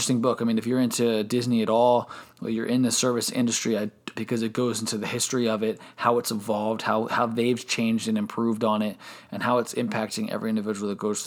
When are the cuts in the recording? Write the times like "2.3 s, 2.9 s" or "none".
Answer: 4.1 s